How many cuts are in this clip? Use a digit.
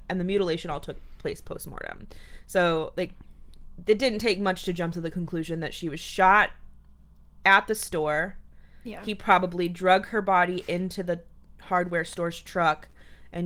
0